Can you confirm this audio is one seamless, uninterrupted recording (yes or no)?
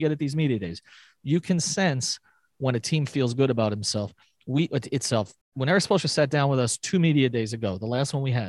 no